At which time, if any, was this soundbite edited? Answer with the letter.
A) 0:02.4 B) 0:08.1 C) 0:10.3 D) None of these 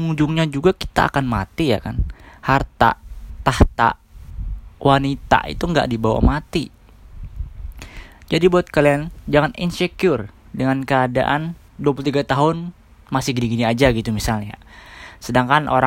D